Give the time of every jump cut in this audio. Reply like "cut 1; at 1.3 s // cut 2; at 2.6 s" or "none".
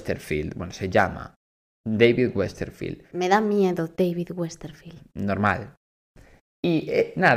none